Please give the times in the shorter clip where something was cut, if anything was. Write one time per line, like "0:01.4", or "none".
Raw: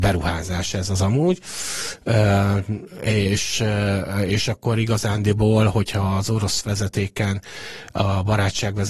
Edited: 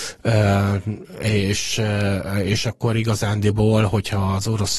none